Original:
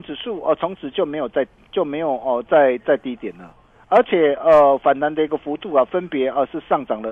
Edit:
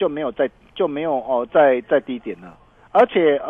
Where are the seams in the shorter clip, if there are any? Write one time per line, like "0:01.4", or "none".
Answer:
none